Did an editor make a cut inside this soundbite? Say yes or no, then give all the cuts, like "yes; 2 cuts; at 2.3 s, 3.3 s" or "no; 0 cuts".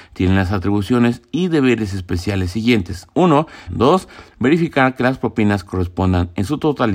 yes; 1 cut; at 3.7 s